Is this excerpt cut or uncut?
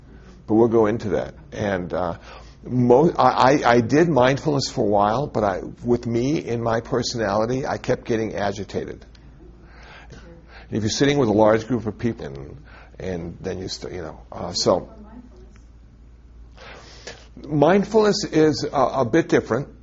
cut